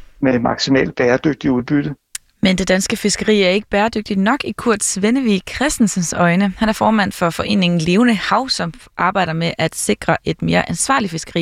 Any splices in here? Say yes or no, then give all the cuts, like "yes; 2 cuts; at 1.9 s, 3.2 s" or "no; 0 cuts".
no; 0 cuts